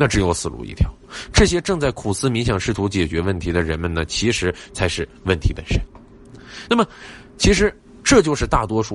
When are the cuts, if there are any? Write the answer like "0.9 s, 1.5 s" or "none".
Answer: none